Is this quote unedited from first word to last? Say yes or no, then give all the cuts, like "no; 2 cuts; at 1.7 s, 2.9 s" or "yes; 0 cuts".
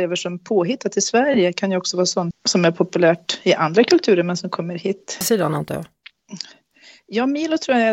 no; 2 cuts; at 2.3 s, 5.2 s